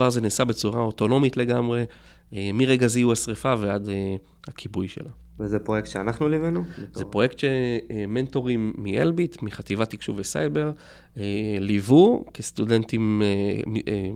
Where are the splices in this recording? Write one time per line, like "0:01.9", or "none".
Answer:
none